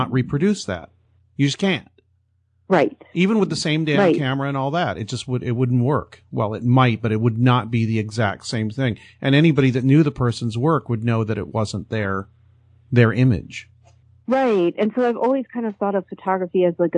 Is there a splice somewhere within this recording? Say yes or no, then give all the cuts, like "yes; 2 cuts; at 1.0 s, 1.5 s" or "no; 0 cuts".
no; 0 cuts